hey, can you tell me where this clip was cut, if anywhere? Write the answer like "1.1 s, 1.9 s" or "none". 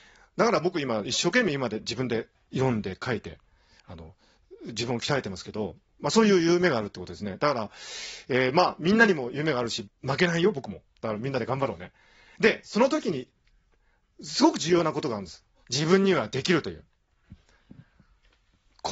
9.8 s, 15.6 s